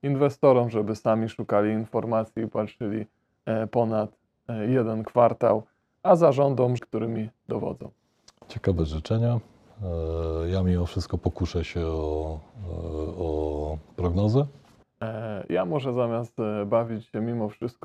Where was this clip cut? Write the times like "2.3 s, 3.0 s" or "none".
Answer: 6.8 s, 14.8 s